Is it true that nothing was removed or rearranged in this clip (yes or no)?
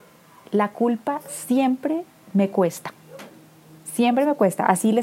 yes